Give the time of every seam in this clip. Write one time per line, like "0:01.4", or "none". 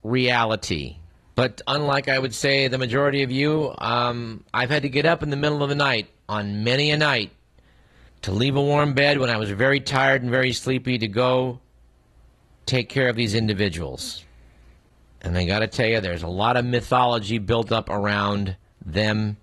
0:01.3